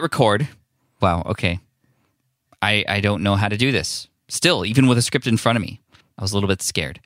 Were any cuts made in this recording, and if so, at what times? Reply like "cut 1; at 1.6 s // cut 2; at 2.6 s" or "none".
cut 1; at 1.0 s